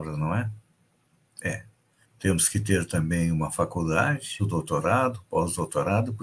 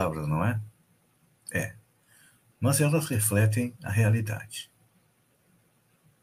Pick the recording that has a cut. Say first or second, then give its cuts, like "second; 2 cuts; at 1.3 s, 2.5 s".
first; 2 cuts; at 2.0 s, 4.4 s